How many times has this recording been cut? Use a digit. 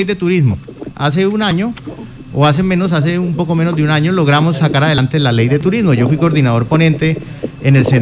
0